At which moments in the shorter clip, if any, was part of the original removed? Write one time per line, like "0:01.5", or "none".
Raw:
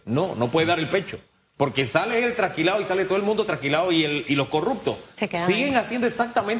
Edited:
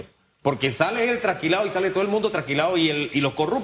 none